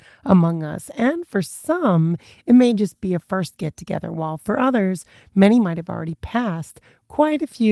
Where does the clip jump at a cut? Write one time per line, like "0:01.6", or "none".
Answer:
none